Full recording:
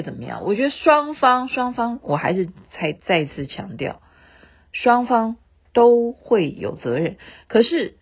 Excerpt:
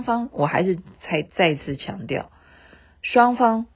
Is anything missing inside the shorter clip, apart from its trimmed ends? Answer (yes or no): no